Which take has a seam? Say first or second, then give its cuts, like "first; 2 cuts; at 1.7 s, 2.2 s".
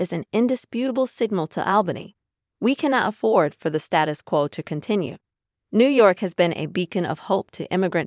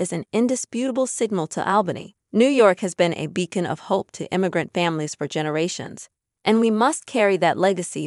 second; 1 cut; at 2.2 s